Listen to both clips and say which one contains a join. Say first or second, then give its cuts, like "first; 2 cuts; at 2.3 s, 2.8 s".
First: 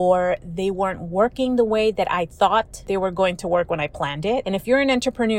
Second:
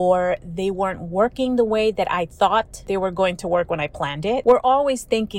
second; 1 cut; at 4.4 s